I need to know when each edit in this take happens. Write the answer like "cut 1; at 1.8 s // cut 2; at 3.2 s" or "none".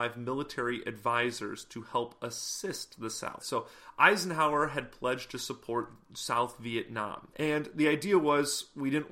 cut 1; at 3.4 s // cut 2; at 7.3 s